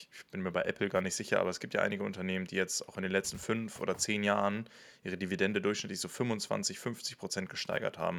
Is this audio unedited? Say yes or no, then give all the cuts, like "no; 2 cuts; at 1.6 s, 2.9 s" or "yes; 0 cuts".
yes; 0 cuts